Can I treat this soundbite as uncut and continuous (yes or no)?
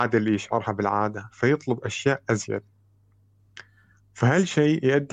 yes